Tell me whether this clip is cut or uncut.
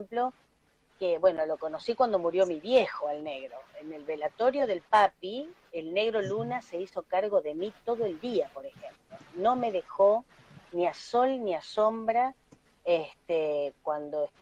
uncut